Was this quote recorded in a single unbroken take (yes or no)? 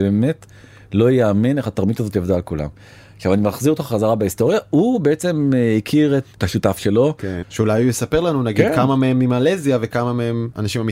no